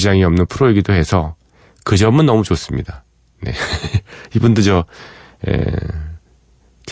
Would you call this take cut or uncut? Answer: uncut